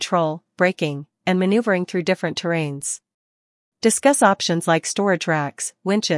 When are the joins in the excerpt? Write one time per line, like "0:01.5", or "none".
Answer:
0:03.7

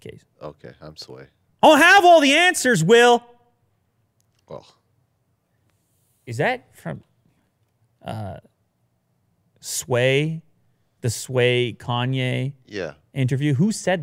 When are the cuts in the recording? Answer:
0:01.5

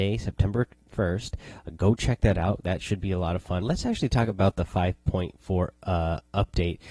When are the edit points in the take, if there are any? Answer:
0:03.6

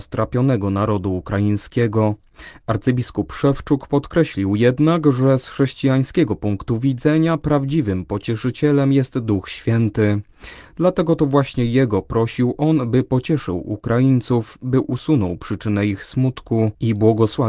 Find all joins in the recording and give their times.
none

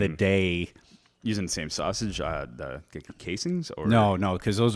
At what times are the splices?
none

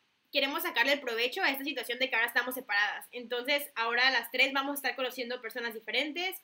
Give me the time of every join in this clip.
none

